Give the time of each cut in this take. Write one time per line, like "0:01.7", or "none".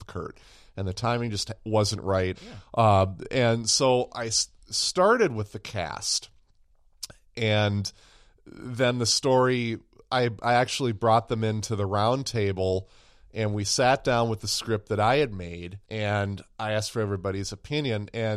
0:02.3
0:15.8